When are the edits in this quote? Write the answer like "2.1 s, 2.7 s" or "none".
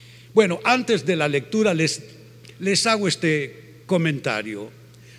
none